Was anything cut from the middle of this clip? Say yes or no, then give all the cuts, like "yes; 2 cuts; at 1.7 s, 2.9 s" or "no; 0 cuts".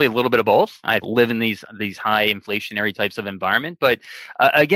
yes; 1 cut; at 1.0 s